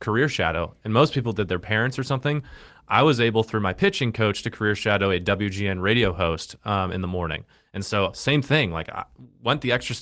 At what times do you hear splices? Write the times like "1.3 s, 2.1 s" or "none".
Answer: none